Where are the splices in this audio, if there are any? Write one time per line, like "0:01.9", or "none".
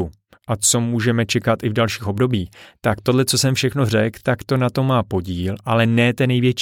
none